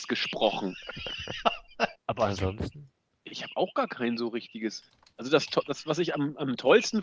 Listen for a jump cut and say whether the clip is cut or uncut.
cut